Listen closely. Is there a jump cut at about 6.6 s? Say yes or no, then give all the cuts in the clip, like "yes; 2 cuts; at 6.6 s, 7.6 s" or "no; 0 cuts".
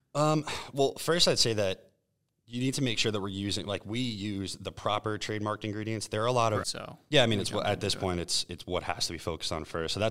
yes; 1 cut; at 6.6 s